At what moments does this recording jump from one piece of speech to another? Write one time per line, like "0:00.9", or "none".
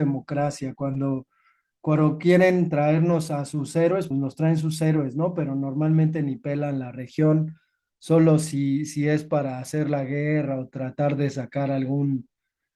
0:04.1